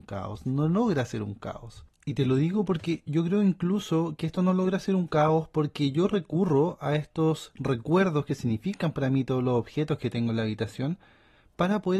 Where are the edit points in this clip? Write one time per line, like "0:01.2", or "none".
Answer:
0:04.2